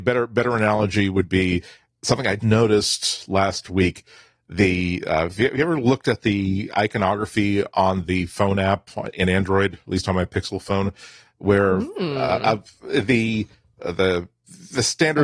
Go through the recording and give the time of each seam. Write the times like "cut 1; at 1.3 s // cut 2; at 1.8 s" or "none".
cut 1; at 2.4 s

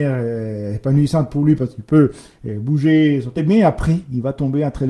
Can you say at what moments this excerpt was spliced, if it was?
none

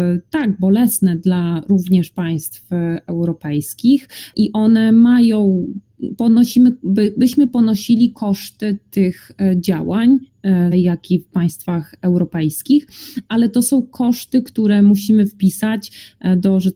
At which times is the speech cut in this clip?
cut 1; at 10.7 s

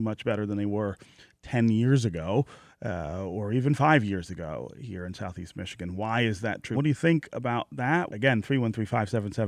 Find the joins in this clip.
cut 1; at 6.7 s // cut 2; at 8.1 s

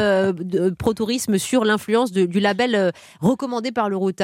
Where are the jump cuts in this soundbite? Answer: none

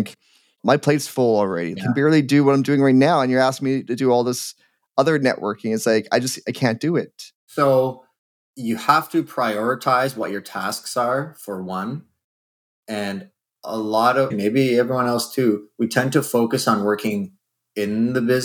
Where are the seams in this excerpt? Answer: cut 1; at 1.8 s // cut 2; at 14.3 s

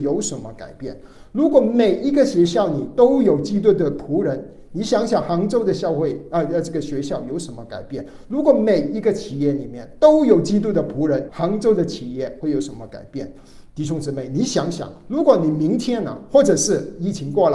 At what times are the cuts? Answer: cut 1; at 11.3 s // cut 2; at 13.7 s

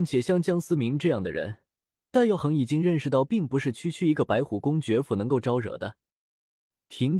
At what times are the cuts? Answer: none

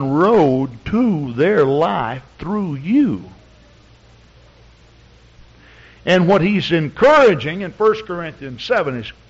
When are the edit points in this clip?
none

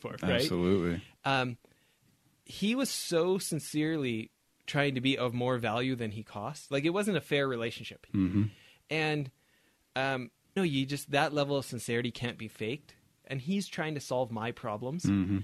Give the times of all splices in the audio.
cut 1; at 8.1 s // cut 2; at 10.6 s // cut 3; at 13.2 s

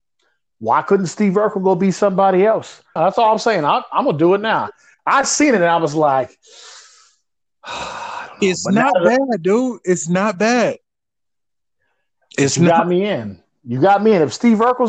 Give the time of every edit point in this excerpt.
cut 1; at 3.0 s

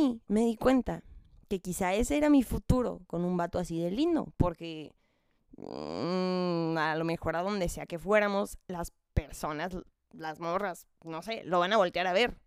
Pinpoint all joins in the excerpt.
none

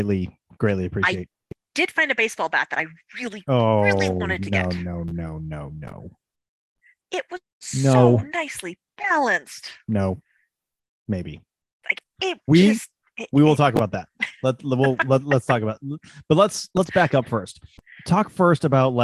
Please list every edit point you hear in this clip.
none

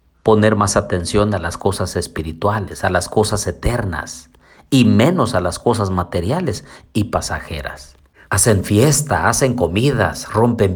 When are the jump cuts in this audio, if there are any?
cut 1; at 8.3 s

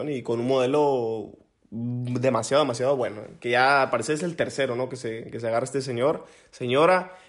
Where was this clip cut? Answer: none

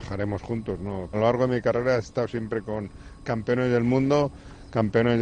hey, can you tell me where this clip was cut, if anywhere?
cut 1; at 1.1 s

